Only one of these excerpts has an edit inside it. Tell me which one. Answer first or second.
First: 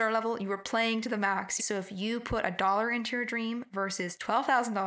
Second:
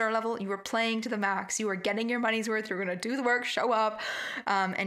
first